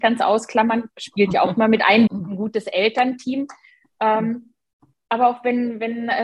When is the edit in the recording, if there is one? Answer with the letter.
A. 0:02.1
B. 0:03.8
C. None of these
A